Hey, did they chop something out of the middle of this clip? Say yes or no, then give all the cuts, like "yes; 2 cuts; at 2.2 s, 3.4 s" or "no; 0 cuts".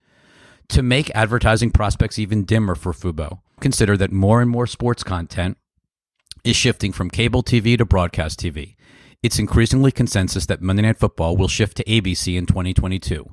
yes; 1 cut; at 3.6 s